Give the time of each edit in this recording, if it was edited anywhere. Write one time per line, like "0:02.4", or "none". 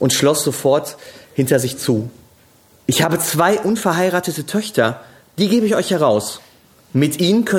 0:02.8